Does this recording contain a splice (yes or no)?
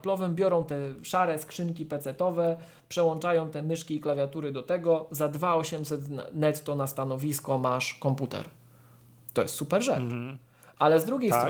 no